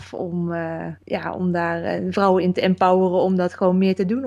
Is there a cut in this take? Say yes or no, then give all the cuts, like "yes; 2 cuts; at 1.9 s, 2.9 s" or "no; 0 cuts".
yes; 1 cut; at 1.0 s